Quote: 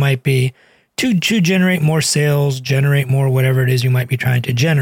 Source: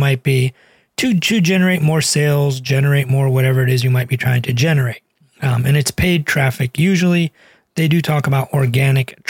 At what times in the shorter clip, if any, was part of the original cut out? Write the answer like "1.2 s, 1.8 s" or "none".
none